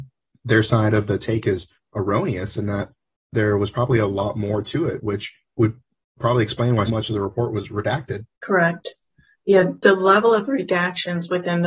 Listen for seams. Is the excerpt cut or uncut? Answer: cut